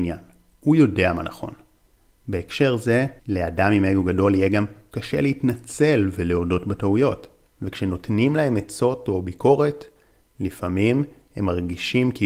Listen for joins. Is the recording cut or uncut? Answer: cut